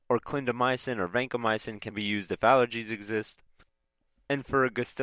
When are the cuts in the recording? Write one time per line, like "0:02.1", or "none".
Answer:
0:01.9